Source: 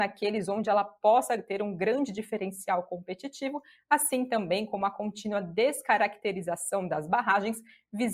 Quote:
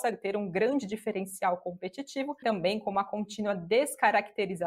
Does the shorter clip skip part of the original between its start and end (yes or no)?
yes